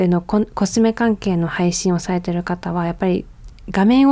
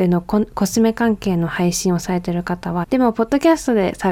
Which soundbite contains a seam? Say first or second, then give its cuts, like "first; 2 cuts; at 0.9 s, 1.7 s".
second; 1 cut; at 2.8 s